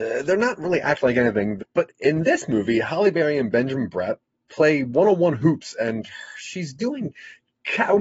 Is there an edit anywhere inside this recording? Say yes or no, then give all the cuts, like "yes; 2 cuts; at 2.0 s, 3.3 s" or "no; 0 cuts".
yes; 1 cut; at 1.6 s